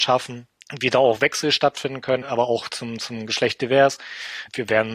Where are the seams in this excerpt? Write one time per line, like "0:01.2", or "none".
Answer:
0:02.2